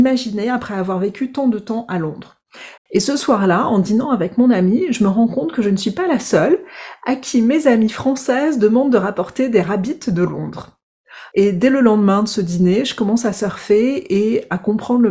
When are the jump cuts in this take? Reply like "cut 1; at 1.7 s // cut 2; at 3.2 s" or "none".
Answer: cut 1; at 2.8 s // cut 2; at 11.3 s